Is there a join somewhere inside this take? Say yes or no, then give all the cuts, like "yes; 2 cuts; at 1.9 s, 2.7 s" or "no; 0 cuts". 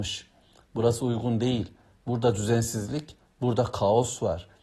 no; 0 cuts